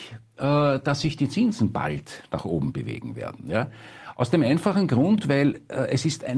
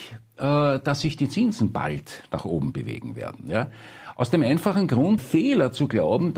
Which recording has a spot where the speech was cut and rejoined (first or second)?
second